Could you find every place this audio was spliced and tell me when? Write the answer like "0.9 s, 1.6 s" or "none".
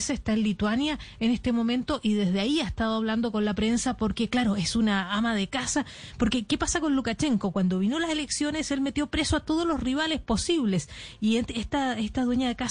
none